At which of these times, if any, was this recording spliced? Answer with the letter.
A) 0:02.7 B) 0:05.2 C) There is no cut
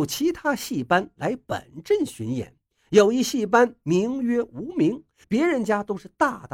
B